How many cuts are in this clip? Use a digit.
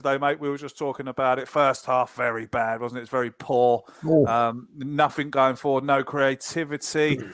0